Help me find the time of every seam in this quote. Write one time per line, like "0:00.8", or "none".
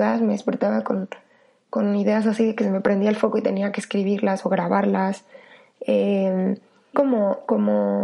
0:06.9